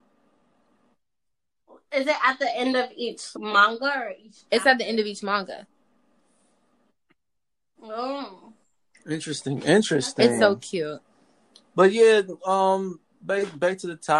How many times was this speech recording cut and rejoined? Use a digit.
1